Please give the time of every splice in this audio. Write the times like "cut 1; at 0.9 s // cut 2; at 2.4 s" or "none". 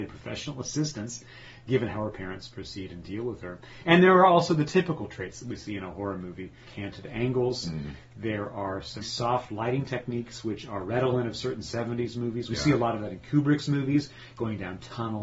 cut 1; at 9.0 s